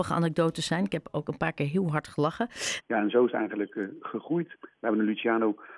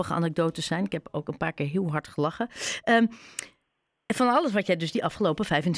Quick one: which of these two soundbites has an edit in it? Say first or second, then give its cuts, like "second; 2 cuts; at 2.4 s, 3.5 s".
first; 2 cuts; at 2.8 s, 4.6 s